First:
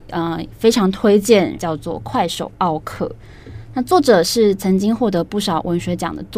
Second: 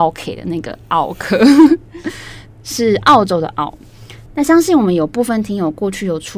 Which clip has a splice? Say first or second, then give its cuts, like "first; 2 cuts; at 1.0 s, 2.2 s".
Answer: first; 1 cut; at 1.5 s